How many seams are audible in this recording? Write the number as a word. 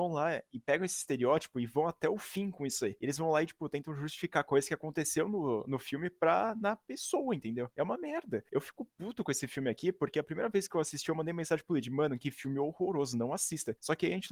zero